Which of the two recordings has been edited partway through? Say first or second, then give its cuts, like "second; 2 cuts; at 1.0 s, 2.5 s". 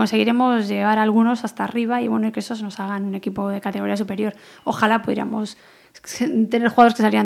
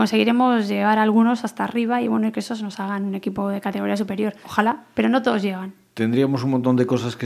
second; 1 cut; at 4.4 s